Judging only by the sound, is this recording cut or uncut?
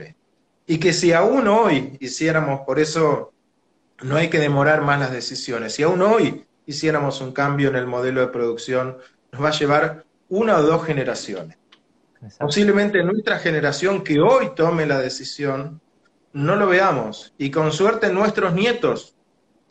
uncut